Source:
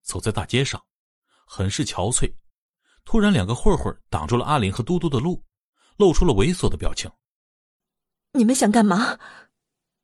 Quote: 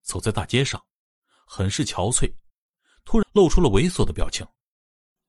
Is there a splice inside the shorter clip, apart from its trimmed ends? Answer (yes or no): yes